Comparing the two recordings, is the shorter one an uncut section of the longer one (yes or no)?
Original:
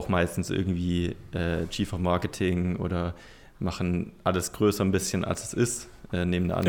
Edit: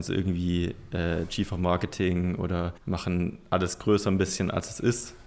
no